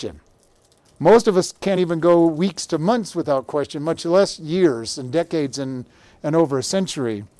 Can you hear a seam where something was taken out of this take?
no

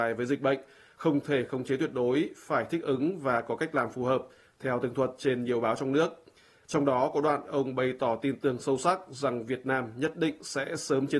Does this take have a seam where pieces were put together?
yes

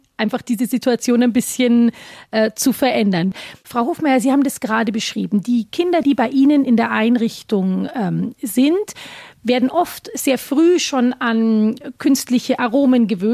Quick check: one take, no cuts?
yes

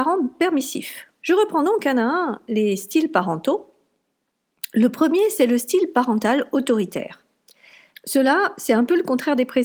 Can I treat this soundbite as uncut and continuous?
no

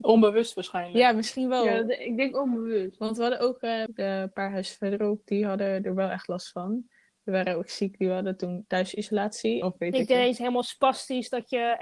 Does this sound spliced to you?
yes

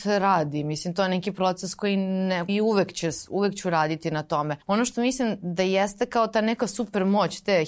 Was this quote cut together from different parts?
yes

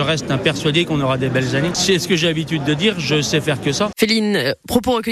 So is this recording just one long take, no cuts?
no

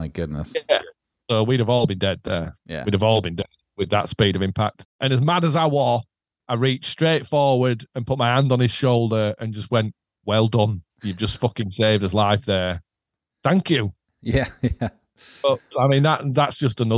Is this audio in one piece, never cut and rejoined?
yes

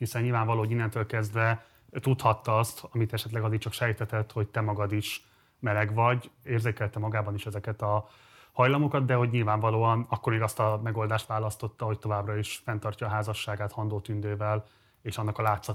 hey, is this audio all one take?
no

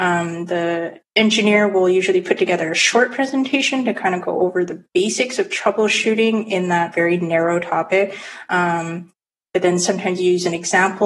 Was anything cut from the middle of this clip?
no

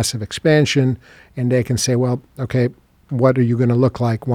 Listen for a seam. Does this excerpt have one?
no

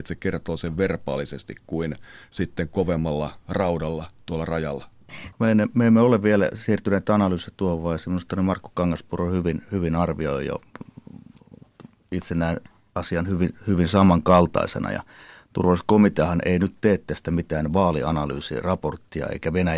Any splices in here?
yes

